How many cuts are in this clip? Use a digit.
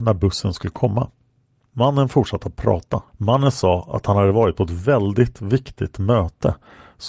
1